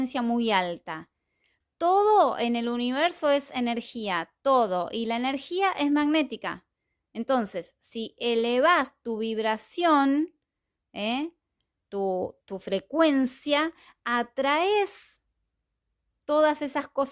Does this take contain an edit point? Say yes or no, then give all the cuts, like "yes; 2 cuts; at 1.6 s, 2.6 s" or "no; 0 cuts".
yes; 1 cut; at 12.4 s